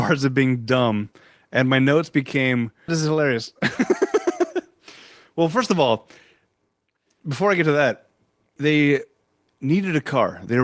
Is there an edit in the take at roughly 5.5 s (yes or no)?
no